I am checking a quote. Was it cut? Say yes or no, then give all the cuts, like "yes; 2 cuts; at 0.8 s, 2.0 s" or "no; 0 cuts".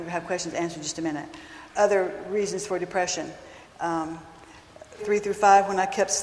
yes; 2 cuts; at 3.7 s, 5.0 s